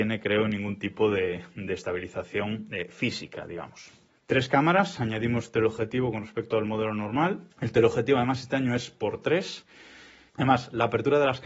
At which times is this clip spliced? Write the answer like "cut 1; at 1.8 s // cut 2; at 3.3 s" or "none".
cut 1; at 4.1 s // cut 2; at 7.5 s // cut 3; at 10.3 s